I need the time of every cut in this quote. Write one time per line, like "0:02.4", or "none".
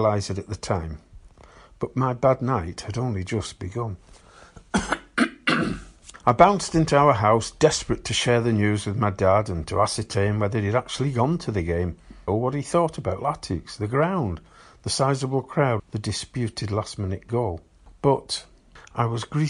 0:12.3
0:15.8